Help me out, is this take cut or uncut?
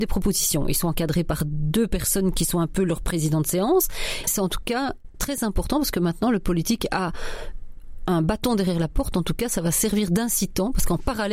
cut